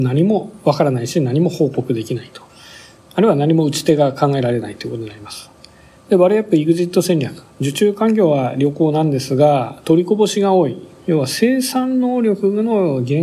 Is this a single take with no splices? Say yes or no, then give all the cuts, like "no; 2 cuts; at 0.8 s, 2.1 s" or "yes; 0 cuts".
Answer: yes; 0 cuts